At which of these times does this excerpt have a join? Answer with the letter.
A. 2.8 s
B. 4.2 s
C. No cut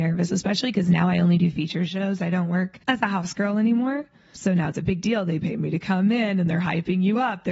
A